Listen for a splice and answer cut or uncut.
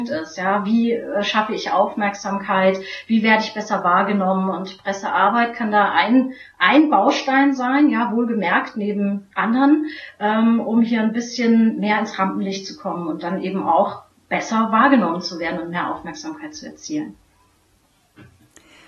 uncut